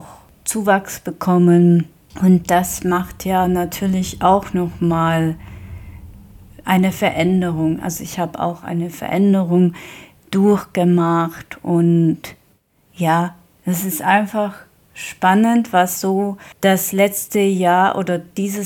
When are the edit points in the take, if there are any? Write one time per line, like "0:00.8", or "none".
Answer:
none